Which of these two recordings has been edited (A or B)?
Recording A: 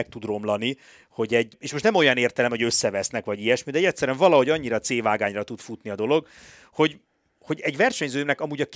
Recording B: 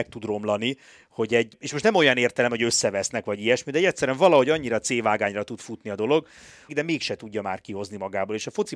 B